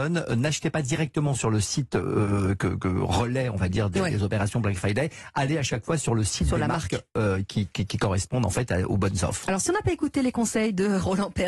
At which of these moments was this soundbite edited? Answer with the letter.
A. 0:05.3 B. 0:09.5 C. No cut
C